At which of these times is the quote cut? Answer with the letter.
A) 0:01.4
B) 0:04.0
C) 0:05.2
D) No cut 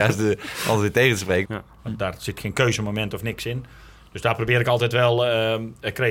A